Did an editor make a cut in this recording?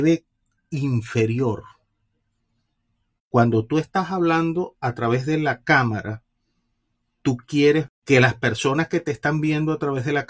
yes; 1 cut; at 3.2 s

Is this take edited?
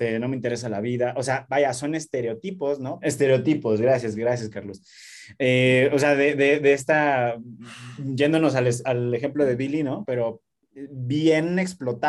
yes; 2 cuts; at 3.0 s, 10.0 s

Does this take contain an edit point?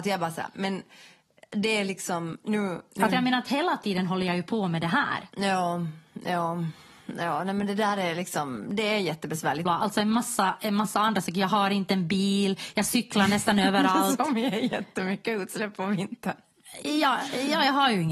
yes; 2 cuts; at 3.1 s, 9.7 s

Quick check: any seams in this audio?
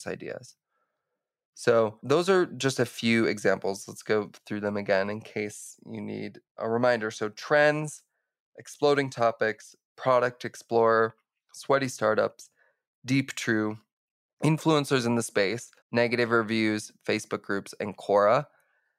yes; 1 cut; at 15.8 s

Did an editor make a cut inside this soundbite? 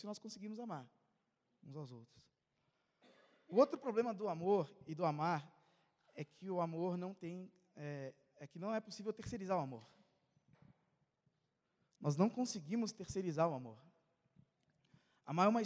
no; 0 cuts

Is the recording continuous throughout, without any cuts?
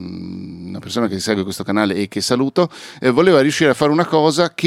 yes; 0 cuts

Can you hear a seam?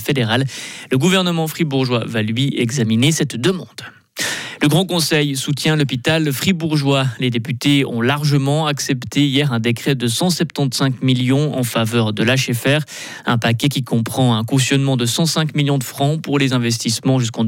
no; 0 cuts

